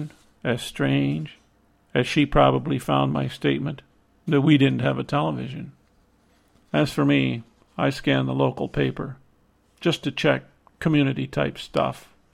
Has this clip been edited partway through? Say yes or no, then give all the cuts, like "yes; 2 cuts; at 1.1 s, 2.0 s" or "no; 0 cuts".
yes; 1 cut; at 6.5 s